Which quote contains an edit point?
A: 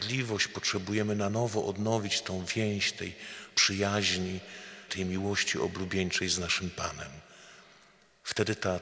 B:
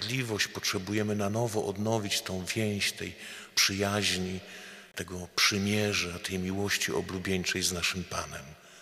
A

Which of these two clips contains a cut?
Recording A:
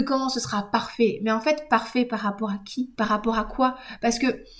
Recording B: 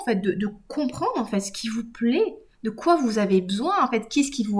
A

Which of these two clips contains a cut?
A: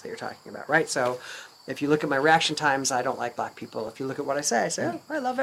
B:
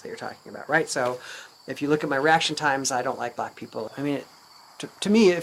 B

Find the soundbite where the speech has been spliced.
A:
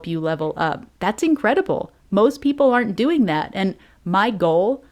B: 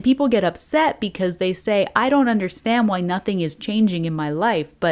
A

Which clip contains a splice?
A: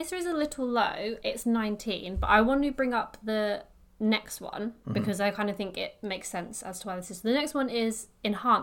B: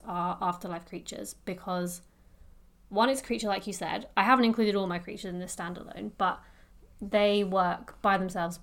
A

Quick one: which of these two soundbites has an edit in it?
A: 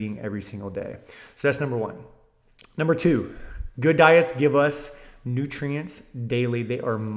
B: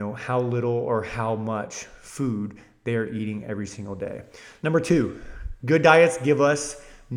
B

